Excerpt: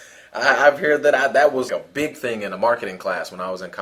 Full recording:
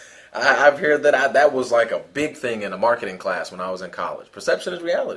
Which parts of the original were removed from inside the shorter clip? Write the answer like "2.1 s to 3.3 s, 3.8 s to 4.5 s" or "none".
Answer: 1.7 s to 1.9 s